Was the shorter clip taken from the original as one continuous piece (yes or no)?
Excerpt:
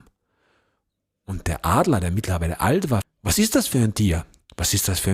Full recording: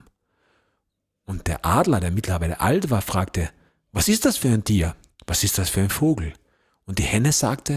no